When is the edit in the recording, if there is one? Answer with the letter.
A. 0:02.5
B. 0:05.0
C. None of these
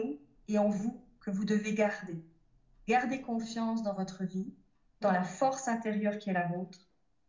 B